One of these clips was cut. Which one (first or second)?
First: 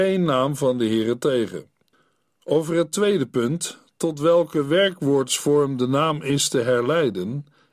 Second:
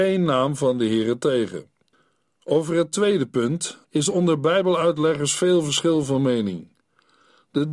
second